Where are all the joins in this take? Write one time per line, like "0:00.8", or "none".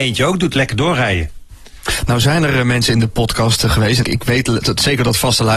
0:04.0